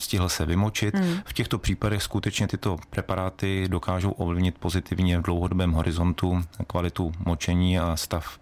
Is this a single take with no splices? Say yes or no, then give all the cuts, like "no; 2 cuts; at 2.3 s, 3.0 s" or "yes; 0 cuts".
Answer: yes; 0 cuts